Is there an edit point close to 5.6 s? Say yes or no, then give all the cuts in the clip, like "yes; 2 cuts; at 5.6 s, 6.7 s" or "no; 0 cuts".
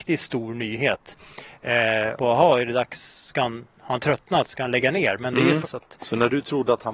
yes; 2 cuts; at 2.2 s, 5.6 s